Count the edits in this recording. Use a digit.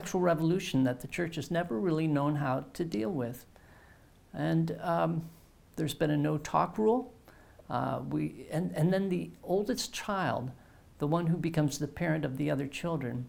0